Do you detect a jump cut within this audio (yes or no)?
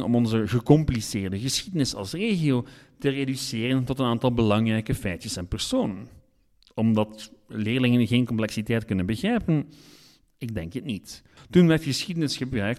yes